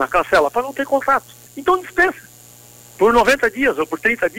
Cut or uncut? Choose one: cut